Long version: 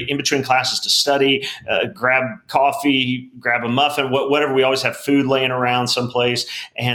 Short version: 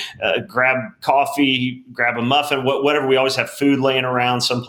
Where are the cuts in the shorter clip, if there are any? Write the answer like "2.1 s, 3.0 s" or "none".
none